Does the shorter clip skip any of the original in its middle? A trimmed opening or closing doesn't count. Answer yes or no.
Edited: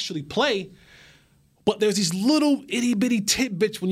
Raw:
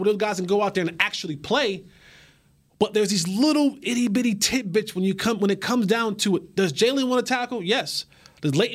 no